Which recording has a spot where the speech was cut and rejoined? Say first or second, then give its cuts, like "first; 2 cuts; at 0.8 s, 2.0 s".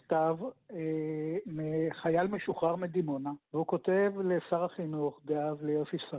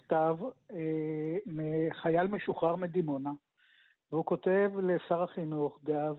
first; 1 cut; at 3.4 s